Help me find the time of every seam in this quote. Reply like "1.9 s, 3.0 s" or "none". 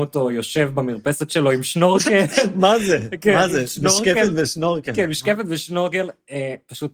none